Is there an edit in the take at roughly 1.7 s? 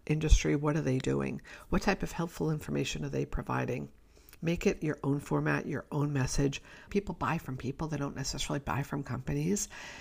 no; 2 cuts; at 4.4 s, 6.9 s

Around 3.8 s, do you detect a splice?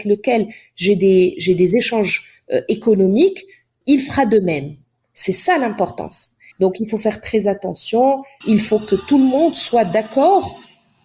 yes; 2 cuts; at 3.8 s, 6.5 s

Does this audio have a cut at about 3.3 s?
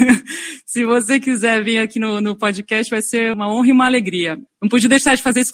yes; 2 cuts; at 3.3 s, 4.5 s

